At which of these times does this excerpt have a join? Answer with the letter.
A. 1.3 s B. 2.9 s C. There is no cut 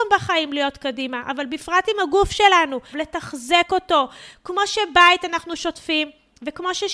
B